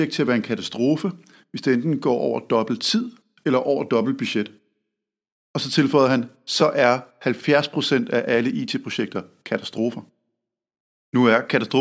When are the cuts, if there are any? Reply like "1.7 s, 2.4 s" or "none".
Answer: none